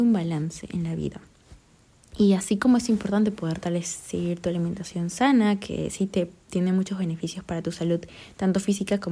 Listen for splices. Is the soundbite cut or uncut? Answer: uncut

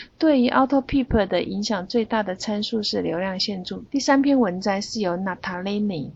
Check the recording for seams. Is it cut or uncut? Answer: cut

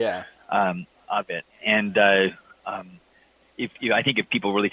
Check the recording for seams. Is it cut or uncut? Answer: uncut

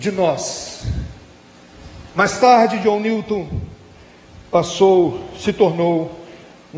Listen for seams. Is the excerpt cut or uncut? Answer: uncut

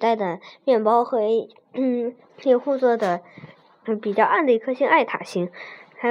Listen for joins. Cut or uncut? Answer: cut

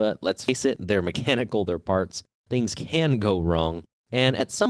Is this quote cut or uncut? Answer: uncut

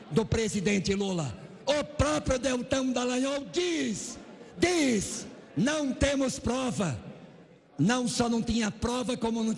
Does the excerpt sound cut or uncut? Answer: uncut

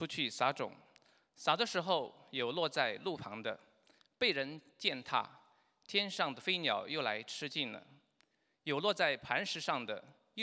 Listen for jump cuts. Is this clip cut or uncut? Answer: uncut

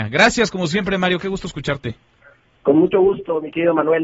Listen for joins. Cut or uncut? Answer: uncut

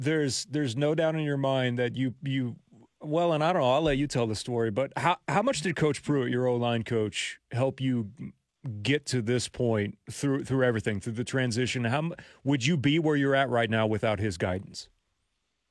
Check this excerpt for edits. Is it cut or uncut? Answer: uncut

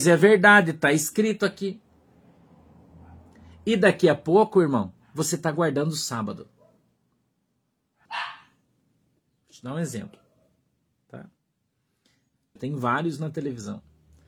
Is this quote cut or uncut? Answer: cut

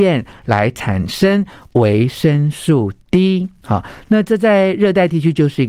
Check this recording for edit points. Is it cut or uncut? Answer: uncut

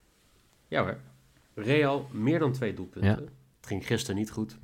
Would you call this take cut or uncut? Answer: cut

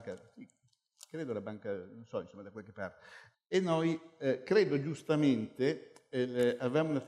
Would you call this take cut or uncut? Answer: cut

